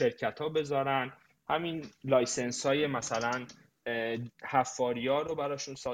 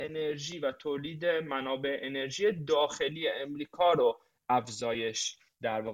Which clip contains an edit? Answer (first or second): first